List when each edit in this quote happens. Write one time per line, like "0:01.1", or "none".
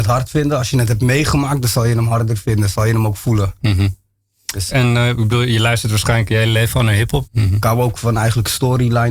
0:04.7
0:07.3